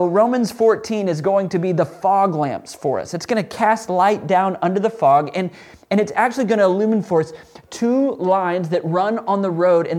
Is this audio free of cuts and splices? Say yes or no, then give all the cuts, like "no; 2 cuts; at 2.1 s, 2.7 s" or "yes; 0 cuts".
yes; 0 cuts